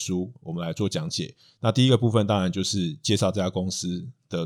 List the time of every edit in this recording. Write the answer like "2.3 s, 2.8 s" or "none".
none